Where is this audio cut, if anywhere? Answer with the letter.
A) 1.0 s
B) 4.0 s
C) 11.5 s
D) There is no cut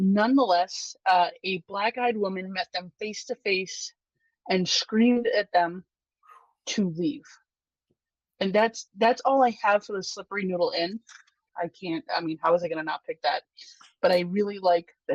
C